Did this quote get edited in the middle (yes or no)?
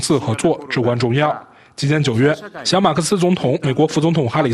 no